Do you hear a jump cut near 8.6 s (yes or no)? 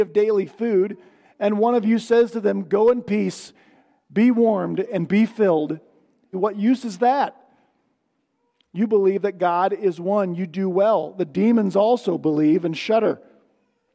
yes